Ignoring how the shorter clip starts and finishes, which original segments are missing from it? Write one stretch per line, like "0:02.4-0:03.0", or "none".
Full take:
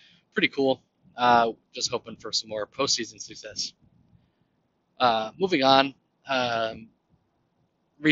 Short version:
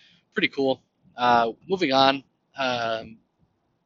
0:01.6-0:05.3